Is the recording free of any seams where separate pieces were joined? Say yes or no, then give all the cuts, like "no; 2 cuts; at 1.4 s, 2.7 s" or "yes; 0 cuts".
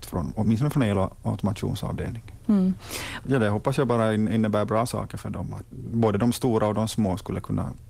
no; 2 cuts; at 3.2 s, 5.7 s